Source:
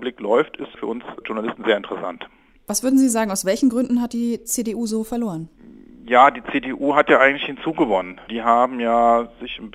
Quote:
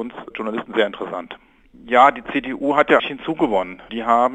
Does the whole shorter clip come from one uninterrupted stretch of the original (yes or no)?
no